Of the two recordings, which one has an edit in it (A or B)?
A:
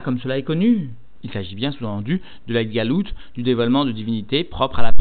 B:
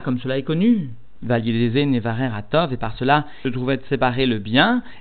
B